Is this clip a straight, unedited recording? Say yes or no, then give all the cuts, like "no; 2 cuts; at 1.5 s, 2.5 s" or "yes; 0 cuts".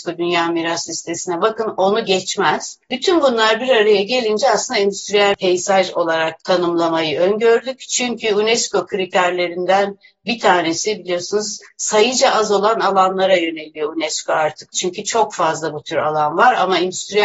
no; 2 cuts; at 6.4 s, 14.7 s